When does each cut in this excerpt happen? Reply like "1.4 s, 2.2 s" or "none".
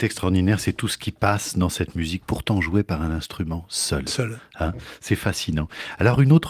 none